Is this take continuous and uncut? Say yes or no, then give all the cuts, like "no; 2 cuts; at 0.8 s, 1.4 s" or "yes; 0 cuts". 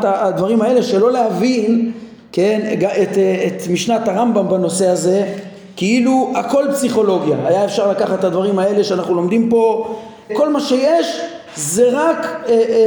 no; 1 cut; at 10.3 s